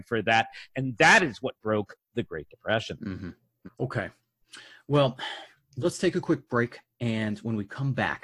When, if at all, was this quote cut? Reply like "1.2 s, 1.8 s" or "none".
3.6 s